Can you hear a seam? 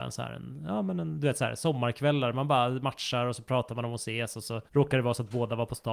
yes; 1 cut; at 4.7 s

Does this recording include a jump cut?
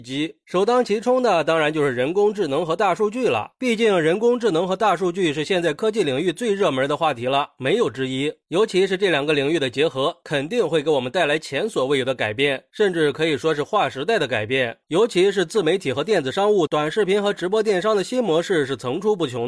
yes; 2 cuts; at 14.8 s, 16.7 s

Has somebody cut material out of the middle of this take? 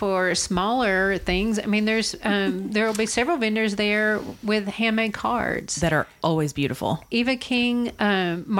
no; 0 cuts

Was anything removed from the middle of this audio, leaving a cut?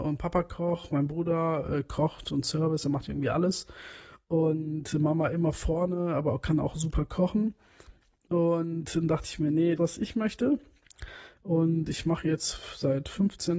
yes; 1 cut; at 9.8 s

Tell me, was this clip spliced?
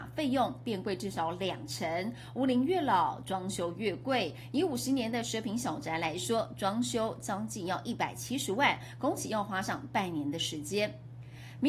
no; 0 cuts

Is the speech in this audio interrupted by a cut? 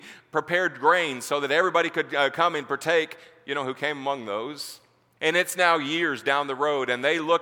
yes; 1 cut; at 5.2 s

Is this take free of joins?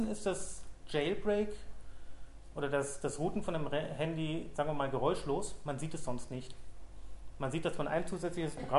yes; 0 cuts

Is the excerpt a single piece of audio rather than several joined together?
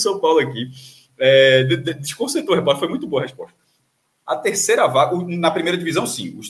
no; 1 cut; at 4.2 s

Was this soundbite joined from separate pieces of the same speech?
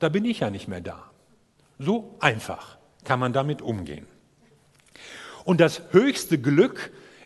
no; 0 cuts

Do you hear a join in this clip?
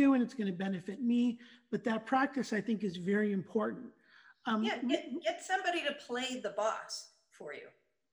no; 0 cuts

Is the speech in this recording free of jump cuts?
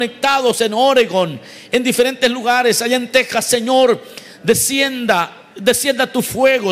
yes; 0 cuts

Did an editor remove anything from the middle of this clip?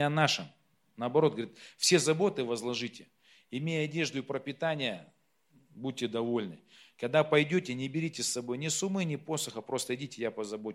no; 0 cuts

